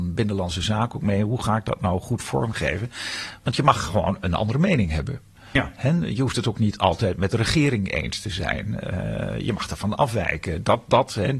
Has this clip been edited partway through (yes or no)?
no